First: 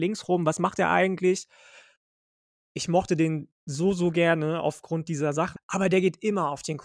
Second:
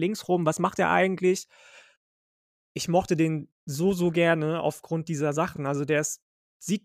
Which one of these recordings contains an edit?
first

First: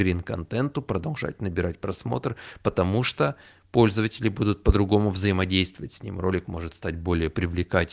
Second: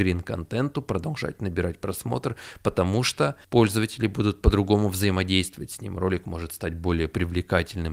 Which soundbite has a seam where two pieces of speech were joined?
second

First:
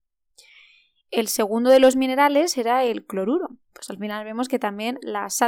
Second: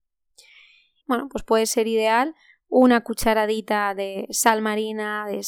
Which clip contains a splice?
second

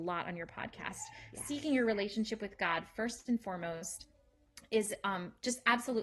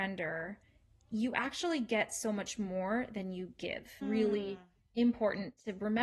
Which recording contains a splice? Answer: second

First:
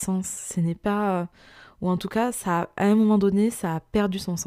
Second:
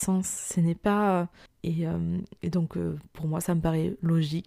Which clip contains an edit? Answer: second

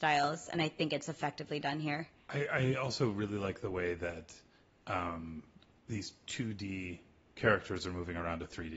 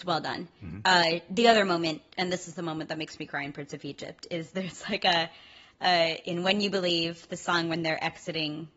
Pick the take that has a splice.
second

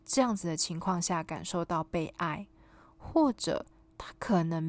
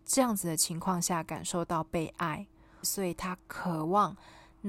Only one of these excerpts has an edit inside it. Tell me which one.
second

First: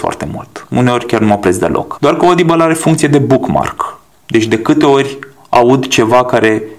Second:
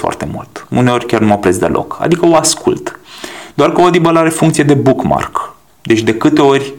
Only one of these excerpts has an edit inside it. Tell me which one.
first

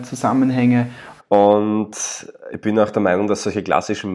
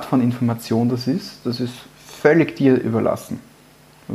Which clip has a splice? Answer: first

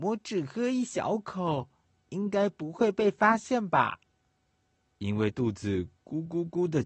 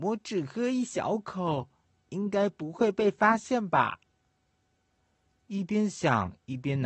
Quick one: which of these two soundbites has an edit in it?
first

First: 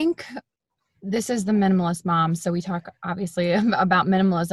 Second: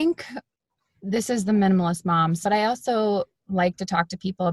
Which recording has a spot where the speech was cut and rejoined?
second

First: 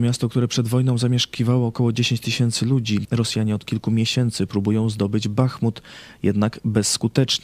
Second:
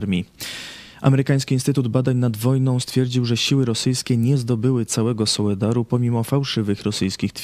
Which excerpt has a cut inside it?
first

